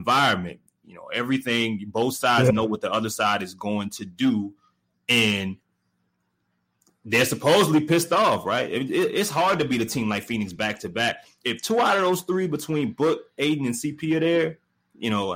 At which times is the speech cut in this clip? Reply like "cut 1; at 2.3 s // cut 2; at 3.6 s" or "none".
cut 1; at 11.4 s